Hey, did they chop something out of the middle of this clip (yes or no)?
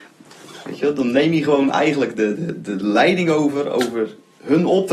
yes